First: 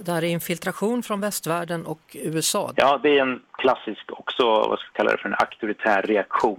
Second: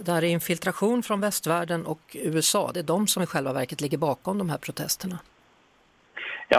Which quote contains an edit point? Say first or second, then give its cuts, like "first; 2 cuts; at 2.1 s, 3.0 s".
first; 1 cut; at 2.7 s